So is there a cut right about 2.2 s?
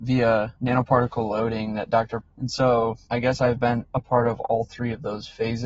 yes; 1 cut; at 2.2 s

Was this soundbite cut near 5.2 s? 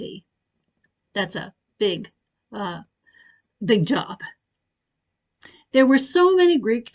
no; 0 cuts

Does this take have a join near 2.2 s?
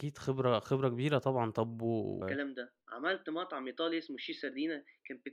yes; 1 cut; at 2.2 s

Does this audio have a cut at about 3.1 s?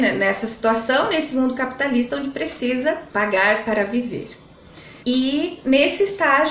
yes; 2 cuts; at 3.1 s, 5.0 s

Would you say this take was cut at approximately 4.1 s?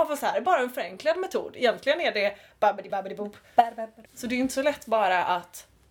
yes; 2 cuts; at 2.9 s, 4.1 s

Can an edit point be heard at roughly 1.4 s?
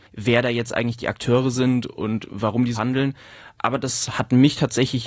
no; 1 cut; at 2.7 s

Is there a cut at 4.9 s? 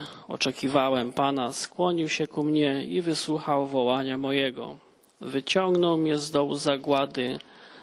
no; 0 cuts

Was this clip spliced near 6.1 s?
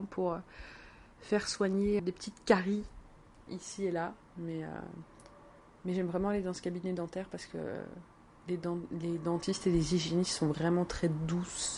no; 2 cuts; at 2.0 s, 3.5 s

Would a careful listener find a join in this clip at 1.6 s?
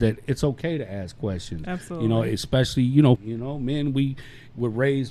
no; 1 cut; at 3.2 s

